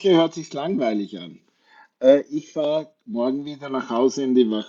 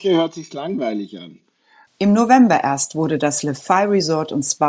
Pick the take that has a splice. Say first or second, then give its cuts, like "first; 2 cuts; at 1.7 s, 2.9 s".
second; 1 cut; at 1.9 s